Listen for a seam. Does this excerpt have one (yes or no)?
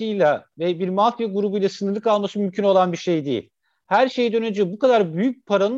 no